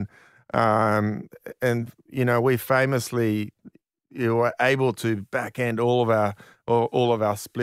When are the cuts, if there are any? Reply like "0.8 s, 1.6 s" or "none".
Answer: none